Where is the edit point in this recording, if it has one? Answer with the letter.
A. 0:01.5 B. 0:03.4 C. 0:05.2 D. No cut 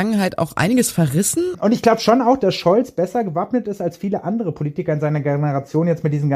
A